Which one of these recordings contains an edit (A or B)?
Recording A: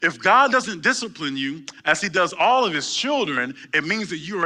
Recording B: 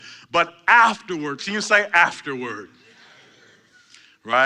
B